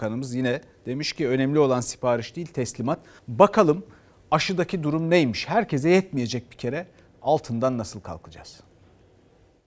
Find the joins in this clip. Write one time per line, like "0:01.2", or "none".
0:03.2